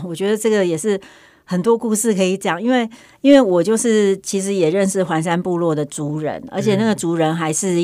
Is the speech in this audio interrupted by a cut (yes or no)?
no